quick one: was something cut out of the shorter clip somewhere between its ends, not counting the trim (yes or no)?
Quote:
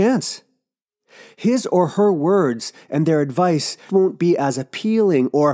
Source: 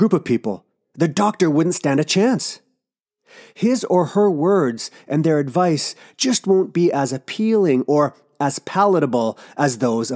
yes